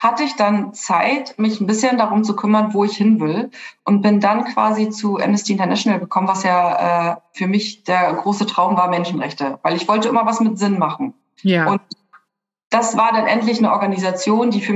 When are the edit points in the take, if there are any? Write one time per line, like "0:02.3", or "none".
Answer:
none